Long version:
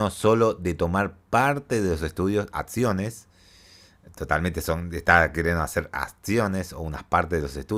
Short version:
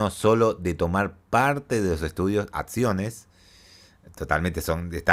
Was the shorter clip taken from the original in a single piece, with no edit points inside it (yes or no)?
yes